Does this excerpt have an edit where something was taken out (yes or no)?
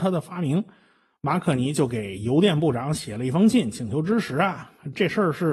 no